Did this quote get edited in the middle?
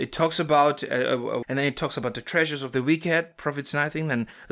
yes; 1 cut; at 1.4 s

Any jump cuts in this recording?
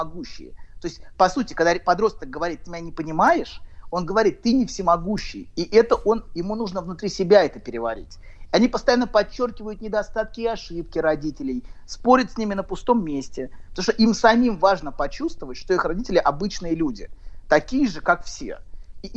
no; 0 cuts

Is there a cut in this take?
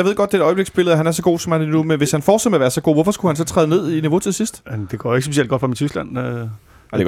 no; 0 cuts

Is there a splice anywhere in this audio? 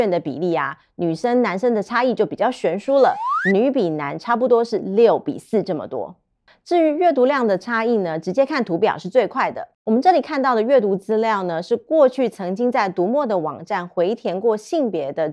yes; 1 cut; at 9.7 s

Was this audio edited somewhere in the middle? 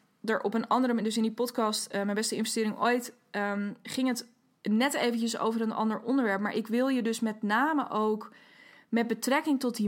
no; 0 cuts

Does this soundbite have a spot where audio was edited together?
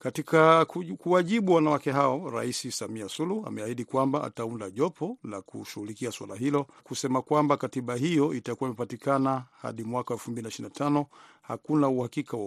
yes; 1 cut; at 6.8 s

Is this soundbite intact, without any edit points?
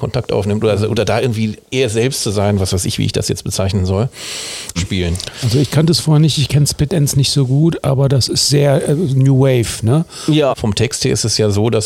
no; 2 cuts; at 4.8 s, 10.5 s

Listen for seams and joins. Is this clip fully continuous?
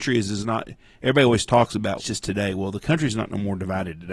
no; 1 cut; at 2.0 s

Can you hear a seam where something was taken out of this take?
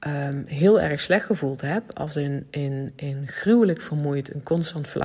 no; 0 cuts

